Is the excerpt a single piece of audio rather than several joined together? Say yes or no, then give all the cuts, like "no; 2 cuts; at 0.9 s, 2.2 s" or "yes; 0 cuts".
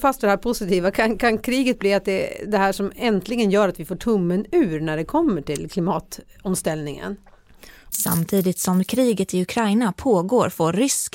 no; 1 cut; at 7.9 s